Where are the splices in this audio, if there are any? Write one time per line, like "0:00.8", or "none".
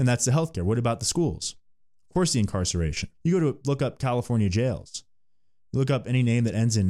0:03.1